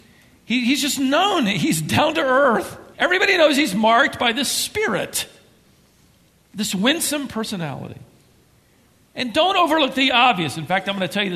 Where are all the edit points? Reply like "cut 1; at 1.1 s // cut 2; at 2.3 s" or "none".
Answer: none